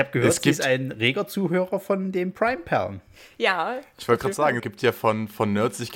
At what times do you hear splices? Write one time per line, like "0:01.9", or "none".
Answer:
0:04.6